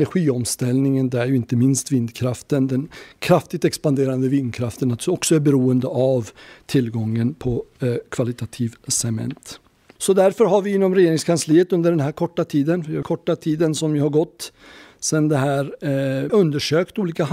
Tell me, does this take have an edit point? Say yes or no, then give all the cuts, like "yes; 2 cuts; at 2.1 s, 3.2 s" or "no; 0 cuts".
yes; 2 cuts; at 13.0 s, 16.3 s